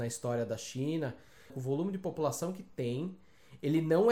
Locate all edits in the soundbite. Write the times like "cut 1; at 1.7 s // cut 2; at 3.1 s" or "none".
cut 1; at 1.5 s